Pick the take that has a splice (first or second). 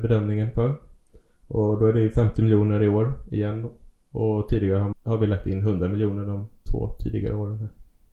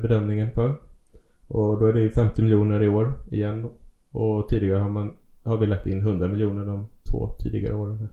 first